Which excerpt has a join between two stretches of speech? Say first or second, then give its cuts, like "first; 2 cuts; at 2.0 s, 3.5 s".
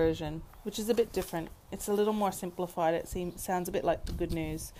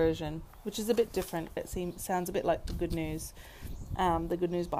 second; 1 cut; at 1.6 s